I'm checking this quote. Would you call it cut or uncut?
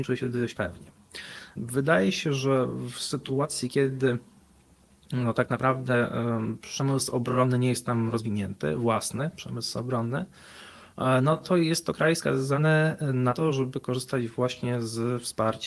cut